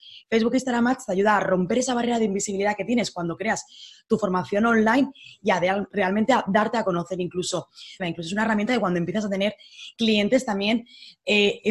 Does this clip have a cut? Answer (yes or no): yes